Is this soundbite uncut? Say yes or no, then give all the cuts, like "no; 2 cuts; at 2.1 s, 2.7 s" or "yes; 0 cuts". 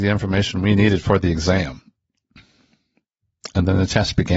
yes; 0 cuts